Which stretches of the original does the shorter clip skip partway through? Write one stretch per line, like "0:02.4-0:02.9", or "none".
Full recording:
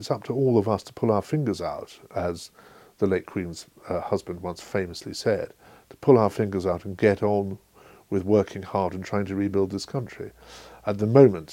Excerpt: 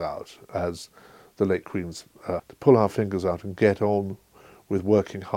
0:04.0-0:05.8